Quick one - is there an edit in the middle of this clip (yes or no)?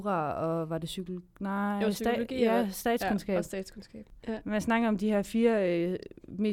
no